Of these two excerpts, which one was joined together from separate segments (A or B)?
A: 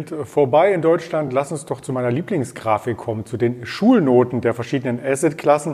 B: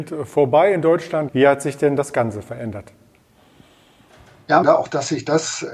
B